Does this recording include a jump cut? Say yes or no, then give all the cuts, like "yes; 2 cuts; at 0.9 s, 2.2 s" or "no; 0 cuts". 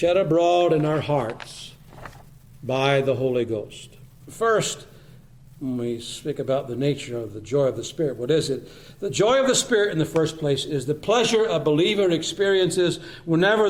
yes; 1 cut; at 4.2 s